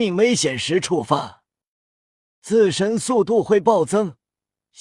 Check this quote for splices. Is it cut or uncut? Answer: cut